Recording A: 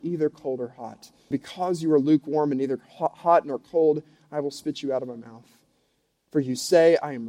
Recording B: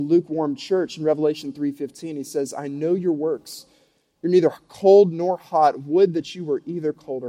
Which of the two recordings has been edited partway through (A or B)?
A